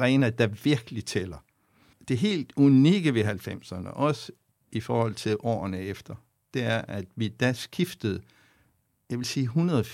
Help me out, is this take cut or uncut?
cut